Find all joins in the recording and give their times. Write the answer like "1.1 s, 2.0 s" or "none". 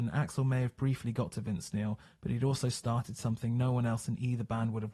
none